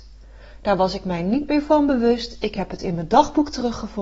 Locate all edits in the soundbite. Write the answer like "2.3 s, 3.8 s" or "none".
none